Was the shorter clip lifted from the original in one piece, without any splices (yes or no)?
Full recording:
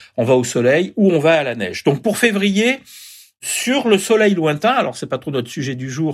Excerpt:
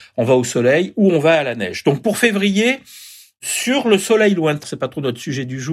no